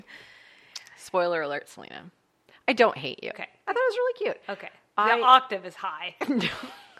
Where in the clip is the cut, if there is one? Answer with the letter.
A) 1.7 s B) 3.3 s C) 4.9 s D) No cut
B